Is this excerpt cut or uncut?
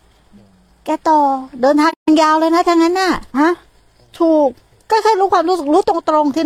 cut